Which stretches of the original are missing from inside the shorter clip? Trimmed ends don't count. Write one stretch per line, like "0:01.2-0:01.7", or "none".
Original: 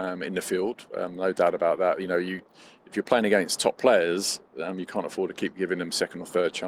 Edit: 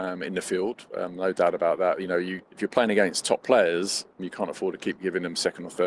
0:02.5-0:02.8
0:04.5-0:04.8